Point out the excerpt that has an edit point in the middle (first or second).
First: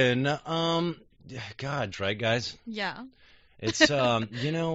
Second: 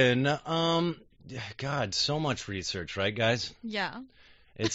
first